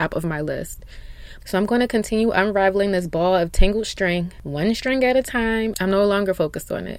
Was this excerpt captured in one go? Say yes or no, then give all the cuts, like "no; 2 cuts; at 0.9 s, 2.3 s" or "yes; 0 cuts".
no; 2 cuts; at 1.4 s, 5.7 s